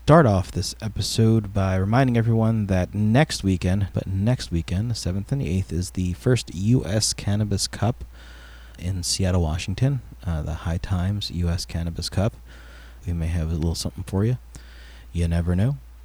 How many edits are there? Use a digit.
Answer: 3